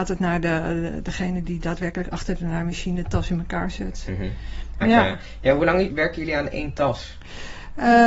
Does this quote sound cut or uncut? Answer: cut